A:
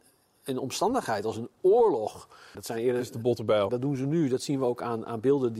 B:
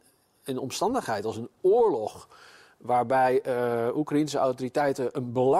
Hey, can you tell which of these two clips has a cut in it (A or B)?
A